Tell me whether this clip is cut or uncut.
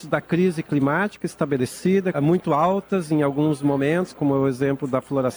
cut